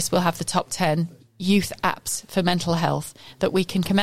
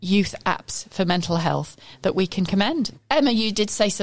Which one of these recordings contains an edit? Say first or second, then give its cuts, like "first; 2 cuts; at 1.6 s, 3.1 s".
second; 1 cut; at 2.9 s